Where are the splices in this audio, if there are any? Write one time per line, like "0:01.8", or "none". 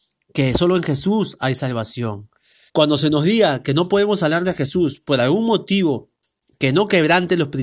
0:02.7